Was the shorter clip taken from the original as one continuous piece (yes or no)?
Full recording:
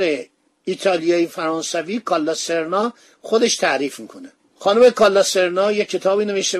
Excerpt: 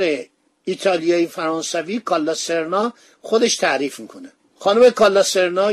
yes